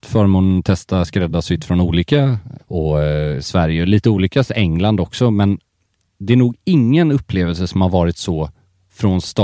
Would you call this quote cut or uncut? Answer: cut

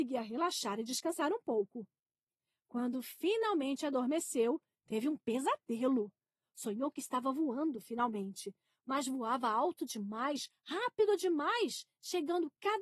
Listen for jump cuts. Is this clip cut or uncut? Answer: uncut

